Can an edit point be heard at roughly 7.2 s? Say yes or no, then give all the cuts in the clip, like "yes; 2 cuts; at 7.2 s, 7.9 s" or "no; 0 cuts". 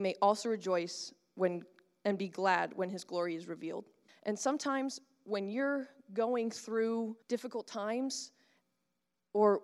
yes; 2 cuts; at 4.1 s, 7.2 s